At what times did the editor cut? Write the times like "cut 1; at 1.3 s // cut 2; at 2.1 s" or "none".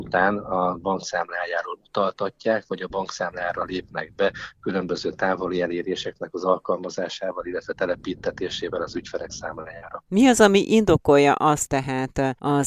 cut 1; at 10.1 s // cut 2; at 11.7 s

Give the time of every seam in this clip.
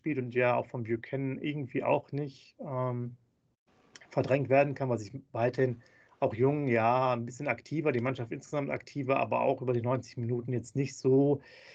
none

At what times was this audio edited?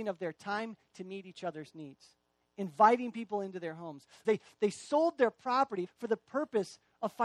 cut 1; at 4.2 s // cut 2; at 5.9 s

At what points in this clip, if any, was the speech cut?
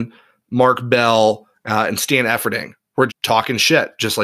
cut 1; at 3.1 s

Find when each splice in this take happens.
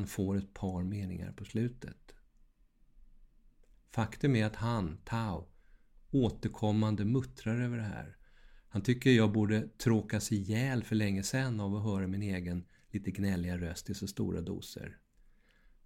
none

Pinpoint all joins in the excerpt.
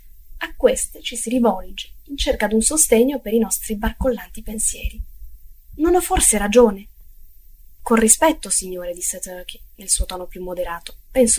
cut 1; at 5.7 s

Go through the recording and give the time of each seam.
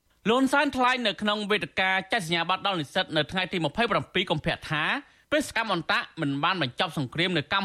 cut 1; at 5.5 s

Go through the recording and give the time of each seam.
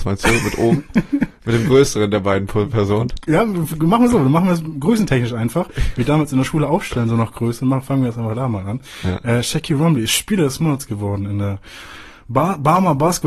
none

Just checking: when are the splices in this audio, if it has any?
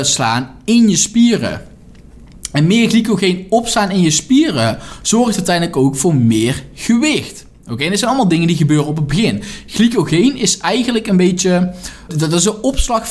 cut 1; at 12.1 s

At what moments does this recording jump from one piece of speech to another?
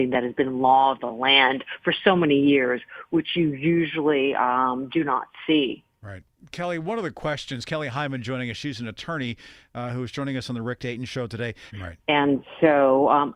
cut 1; at 11.7 s

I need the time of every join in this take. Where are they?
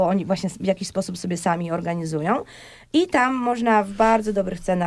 none

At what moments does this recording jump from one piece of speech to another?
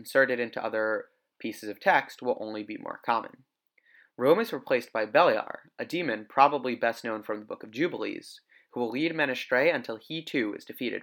none

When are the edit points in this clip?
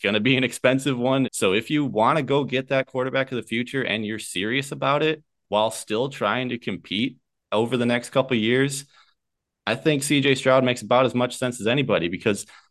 cut 1; at 1.2 s

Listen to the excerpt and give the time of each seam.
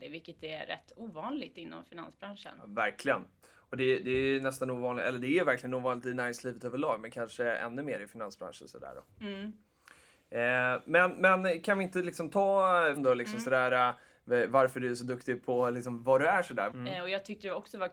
cut 1; at 13.0 s // cut 2; at 16.7 s

